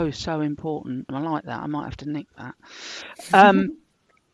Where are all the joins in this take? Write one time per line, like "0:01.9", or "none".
0:01.1